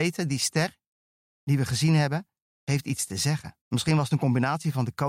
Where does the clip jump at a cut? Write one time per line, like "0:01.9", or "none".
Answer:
0:03.6

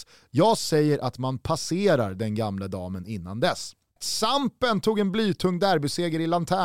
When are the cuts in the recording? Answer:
0:04.0

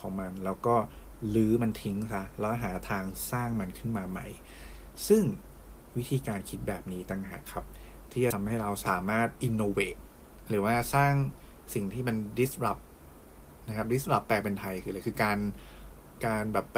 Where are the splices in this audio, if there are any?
none

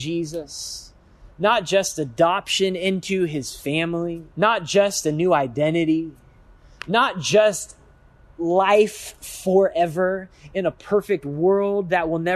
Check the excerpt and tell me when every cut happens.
0:04.3

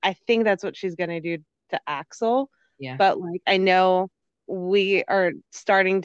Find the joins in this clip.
0:04.4

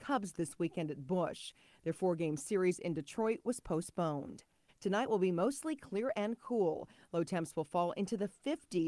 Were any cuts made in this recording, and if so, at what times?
0:04.7

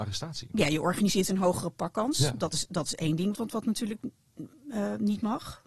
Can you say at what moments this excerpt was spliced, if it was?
0:03.3

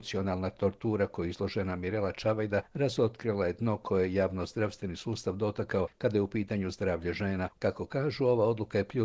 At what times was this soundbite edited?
0:07.6

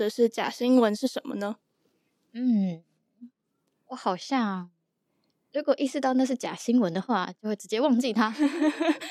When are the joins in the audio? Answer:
none

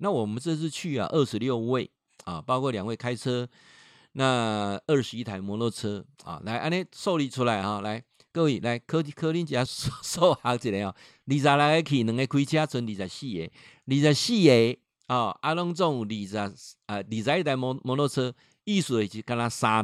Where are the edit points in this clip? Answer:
0:09.7

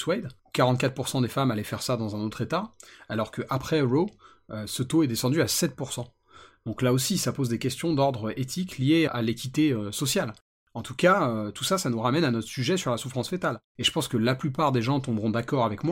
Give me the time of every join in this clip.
0:09.1
0:10.6

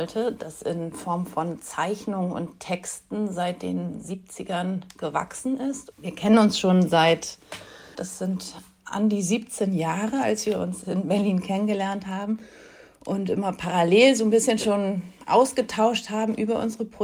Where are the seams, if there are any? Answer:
0:05.9
0:07.9

